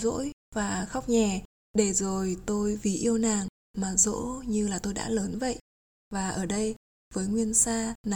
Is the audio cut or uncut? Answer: cut